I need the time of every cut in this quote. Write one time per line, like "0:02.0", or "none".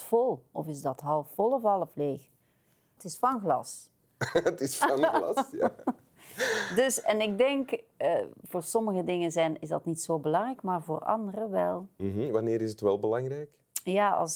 0:03.0